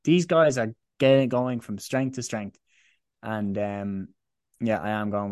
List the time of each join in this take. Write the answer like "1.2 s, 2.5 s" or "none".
none